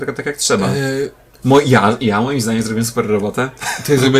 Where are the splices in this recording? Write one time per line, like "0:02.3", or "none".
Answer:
none